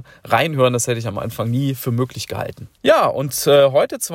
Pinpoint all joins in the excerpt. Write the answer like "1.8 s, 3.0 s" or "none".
2.8 s